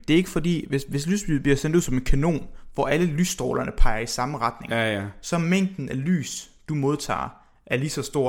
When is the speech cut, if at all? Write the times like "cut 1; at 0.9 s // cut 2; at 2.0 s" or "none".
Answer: none